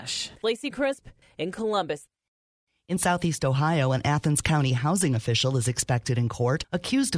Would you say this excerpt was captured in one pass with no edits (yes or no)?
yes